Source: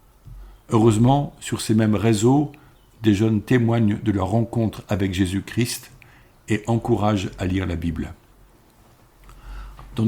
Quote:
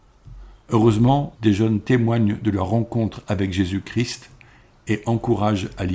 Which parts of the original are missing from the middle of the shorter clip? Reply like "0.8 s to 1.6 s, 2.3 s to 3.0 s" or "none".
1.3 s to 3.0 s